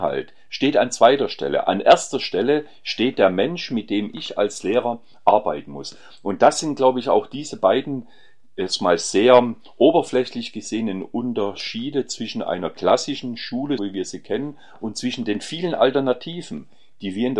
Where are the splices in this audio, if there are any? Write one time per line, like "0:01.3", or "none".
0:13.8